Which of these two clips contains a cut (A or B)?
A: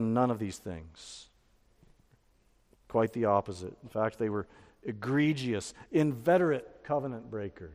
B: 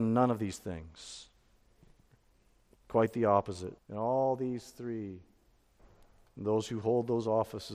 B